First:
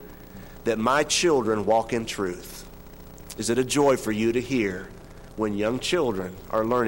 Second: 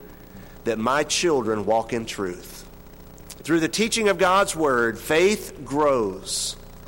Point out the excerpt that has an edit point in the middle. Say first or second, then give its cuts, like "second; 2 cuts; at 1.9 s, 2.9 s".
second; 1 cut; at 3.4 s